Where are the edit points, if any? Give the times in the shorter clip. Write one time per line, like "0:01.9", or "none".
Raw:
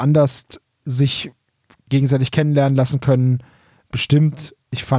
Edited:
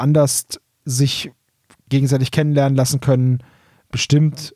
none